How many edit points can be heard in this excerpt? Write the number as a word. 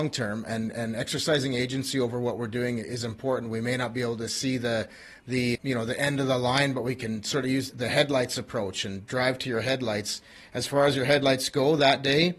two